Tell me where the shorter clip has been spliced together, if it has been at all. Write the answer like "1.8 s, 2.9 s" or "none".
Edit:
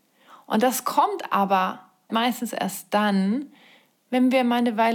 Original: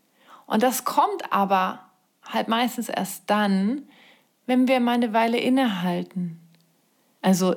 2.1 s